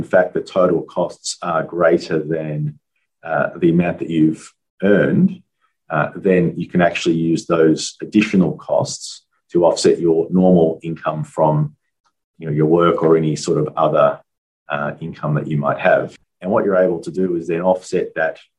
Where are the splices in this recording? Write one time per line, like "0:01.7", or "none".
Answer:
0:16.2

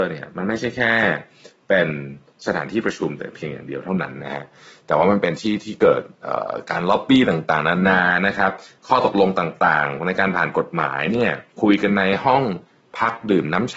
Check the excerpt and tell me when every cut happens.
0:11.5

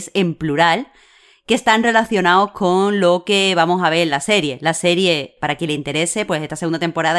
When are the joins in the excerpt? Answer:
0:05.4

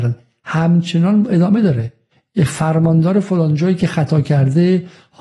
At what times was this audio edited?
none

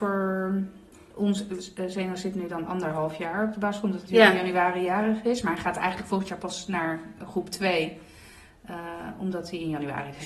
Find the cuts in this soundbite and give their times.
none

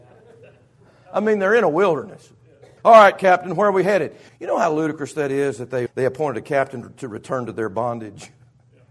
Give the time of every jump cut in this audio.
0:02.8
0:04.3
0:05.9

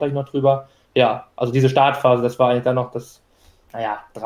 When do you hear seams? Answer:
none

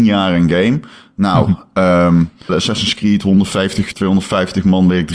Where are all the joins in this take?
0:02.5
0:03.9

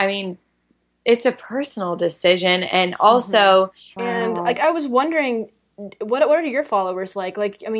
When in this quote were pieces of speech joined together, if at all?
0:04.0

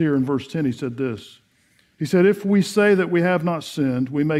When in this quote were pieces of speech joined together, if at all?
0:01.9

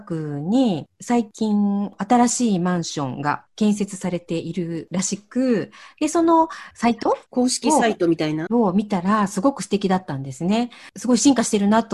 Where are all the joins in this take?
0:07.3
0:08.5

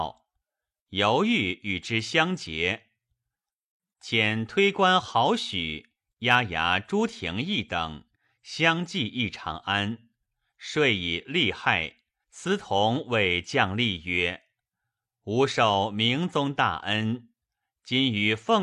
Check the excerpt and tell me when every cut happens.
0:12.2

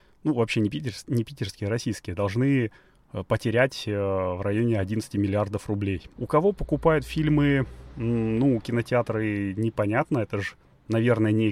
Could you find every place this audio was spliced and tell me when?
0:06.2

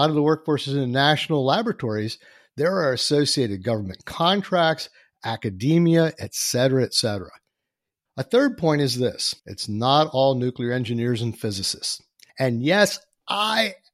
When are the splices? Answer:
0:08.1
0:09.4
0:12.3

